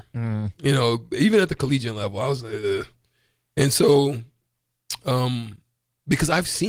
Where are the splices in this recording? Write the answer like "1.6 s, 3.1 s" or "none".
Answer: none